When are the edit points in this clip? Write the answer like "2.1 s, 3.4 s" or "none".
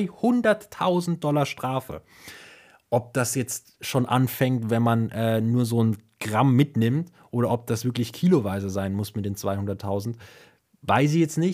none